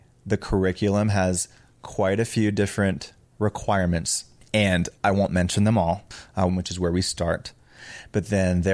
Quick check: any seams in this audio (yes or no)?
yes